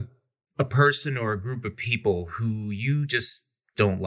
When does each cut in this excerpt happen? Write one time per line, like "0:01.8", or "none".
none

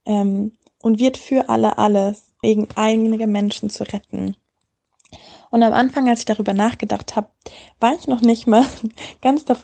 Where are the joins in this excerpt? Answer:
0:02.4

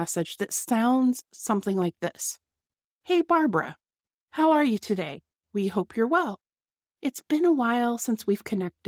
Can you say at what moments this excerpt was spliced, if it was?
none

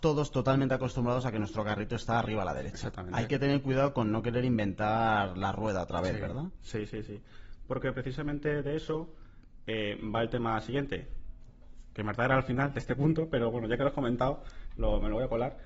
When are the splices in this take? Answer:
none

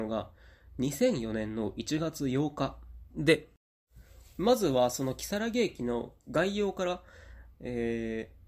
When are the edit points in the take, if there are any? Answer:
0:03.1

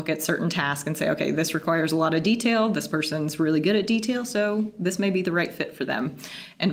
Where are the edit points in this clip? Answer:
none

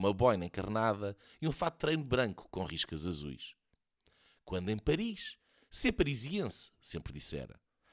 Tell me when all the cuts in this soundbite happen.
none

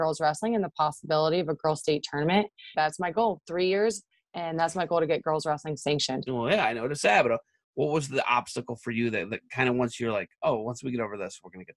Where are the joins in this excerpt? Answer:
0:02.7
0:06.3

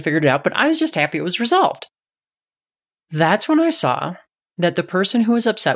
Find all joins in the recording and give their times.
none

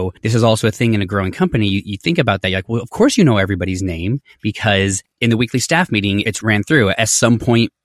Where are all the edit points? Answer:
none

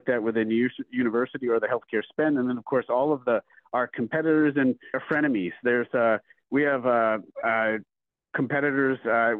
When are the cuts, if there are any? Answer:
0:04.9

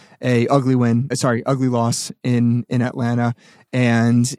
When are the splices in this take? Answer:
0:01.1

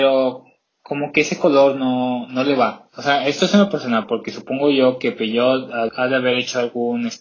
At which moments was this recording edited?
0:02.9
0:05.9

